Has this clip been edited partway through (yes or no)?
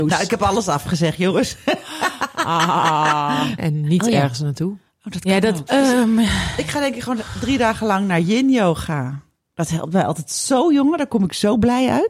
yes